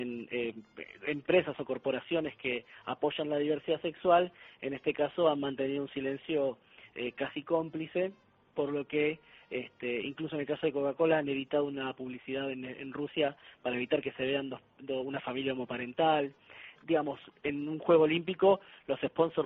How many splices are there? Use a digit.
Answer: 1